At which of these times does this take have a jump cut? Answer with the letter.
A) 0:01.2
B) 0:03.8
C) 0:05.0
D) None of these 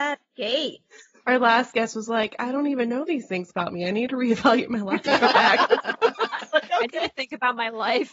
C